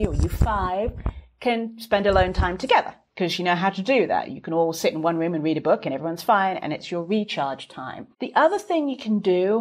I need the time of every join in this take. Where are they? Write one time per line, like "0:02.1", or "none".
0:08.1